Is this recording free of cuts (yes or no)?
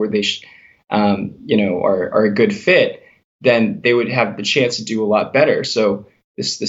yes